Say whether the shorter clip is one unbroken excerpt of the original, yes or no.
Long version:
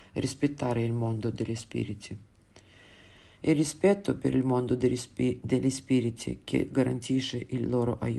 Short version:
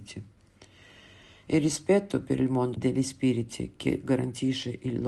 no